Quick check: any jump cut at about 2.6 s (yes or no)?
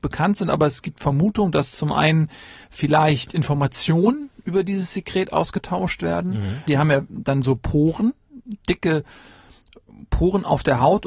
no